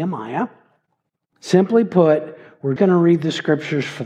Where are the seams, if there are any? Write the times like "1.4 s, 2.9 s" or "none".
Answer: 1.3 s, 2.8 s